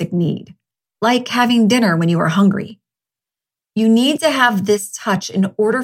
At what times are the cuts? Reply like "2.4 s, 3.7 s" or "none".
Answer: none